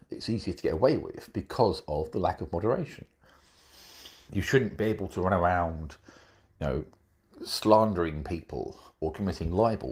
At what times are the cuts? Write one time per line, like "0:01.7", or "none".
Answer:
0:04.3